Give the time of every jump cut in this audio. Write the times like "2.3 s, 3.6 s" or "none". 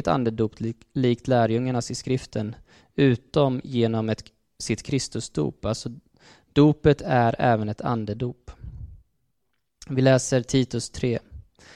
none